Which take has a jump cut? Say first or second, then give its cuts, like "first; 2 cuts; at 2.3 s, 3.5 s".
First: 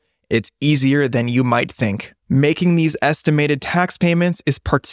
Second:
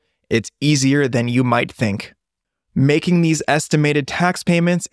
first; 1 cut; at 2.2 s